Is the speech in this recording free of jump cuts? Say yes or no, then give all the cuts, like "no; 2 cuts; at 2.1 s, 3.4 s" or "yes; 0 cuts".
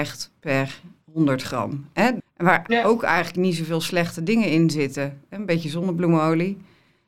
no; 1 cut; at 2.2 s